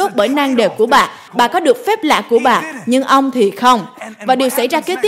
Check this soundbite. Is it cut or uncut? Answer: cut